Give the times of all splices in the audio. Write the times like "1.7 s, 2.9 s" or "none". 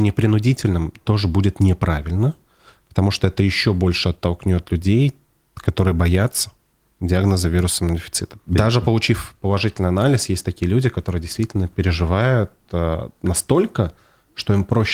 8.5 s